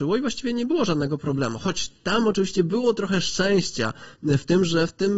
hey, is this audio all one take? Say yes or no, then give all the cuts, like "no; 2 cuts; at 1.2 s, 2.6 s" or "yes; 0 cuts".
yes; 0 cuts